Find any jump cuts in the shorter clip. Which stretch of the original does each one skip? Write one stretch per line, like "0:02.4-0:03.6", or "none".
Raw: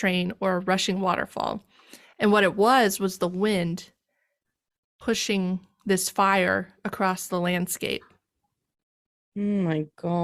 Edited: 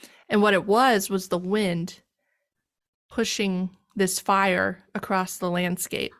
none